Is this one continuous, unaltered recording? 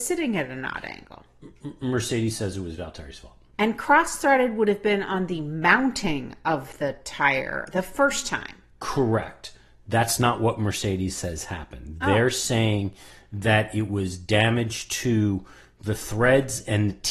no; 1 cut; at 3.5 s

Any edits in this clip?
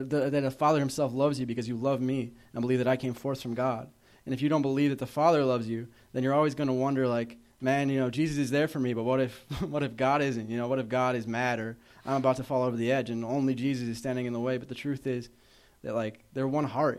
no; 0 cuts

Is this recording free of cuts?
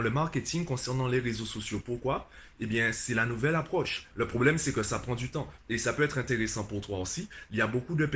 no; 2 cuts; at 4.1 s, 5.6 s

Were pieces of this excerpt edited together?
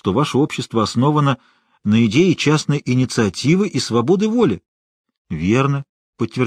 no; 0 cuts

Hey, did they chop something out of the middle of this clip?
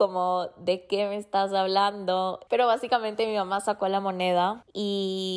yes; 1 cut; at 2.5 s

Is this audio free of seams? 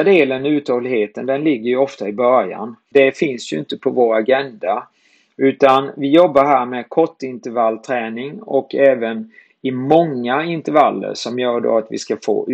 no; 1 cut; at 2.9 s

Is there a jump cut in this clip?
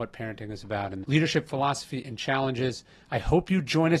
yes; 1 cut; at 1.0 s

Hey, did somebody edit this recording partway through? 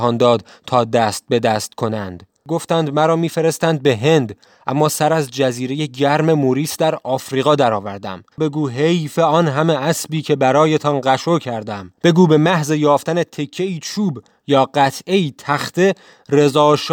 yes; 2 cuts; at 8.3 s, 12.0 s

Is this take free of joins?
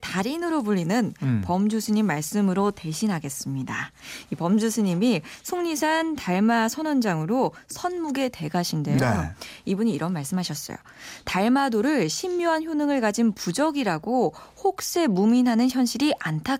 yes; 0 cuts

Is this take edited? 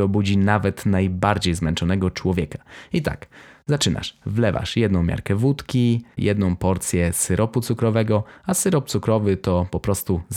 yes; 1 cut; at 6.2 s

